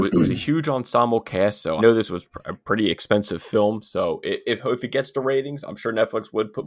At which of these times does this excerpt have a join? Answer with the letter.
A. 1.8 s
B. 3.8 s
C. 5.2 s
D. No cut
A